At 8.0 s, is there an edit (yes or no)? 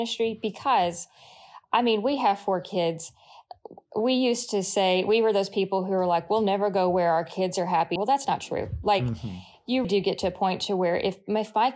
yes